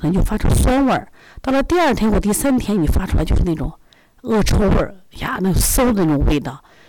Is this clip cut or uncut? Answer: uncut